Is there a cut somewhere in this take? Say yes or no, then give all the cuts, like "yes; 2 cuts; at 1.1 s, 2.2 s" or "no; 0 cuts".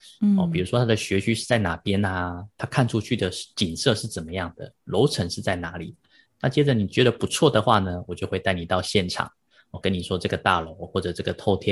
yes; 1 cut; at 6.3 s